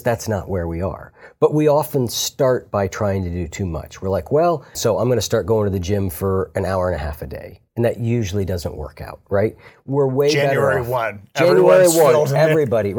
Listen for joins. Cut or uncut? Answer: cut